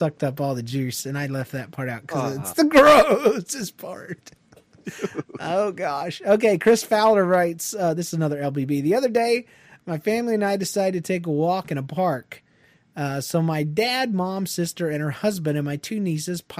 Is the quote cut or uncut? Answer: uncut